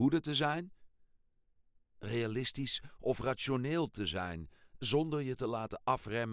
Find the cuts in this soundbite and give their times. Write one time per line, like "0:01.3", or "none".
none